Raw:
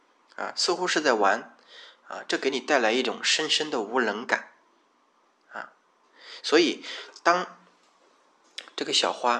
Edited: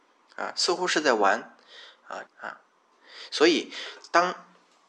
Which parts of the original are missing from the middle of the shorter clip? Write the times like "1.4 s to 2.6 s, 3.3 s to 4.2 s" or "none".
2.3 s to 5.4 s